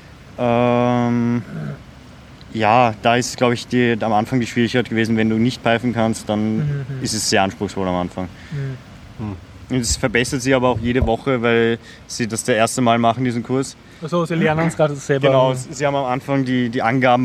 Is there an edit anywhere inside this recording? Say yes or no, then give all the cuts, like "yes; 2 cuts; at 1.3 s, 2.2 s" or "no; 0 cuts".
no; 0 cuts